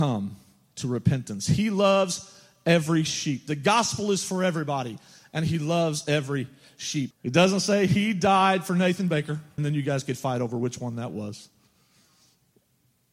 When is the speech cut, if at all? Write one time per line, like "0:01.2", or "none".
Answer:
0:07.1
0:09.6